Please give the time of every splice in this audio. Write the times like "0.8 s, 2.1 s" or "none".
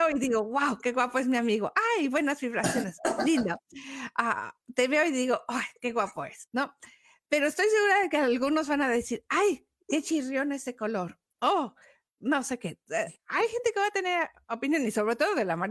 none